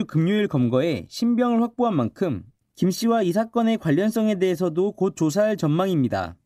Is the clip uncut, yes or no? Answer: yes